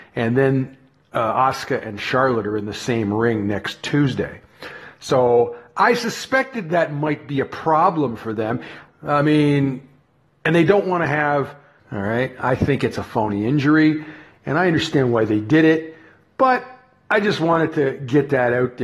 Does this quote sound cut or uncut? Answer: cut